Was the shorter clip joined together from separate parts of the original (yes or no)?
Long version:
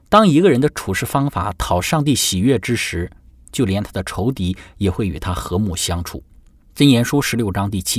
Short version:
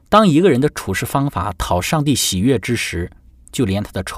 no